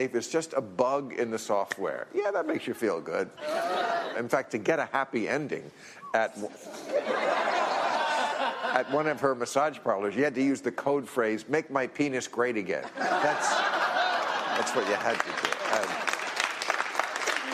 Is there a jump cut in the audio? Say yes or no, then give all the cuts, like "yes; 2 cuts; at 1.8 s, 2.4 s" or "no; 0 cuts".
yes; 1 cut; at 4.1 s